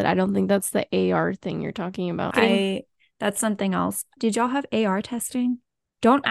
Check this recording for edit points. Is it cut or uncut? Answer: cut